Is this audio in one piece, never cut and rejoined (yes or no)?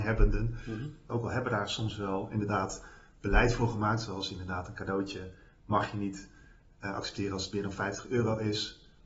no